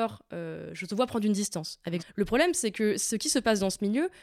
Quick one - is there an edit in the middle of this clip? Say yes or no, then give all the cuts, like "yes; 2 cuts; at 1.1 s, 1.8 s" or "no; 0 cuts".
yes; 1 cut; at 2.0 s